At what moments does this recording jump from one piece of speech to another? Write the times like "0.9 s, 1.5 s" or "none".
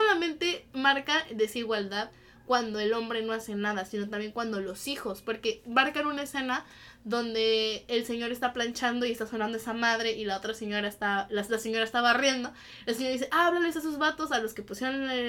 none